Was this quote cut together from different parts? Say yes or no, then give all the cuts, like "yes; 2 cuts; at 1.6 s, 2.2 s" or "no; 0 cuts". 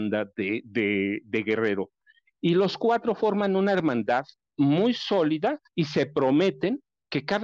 yes; 1 cut; at 5.7 s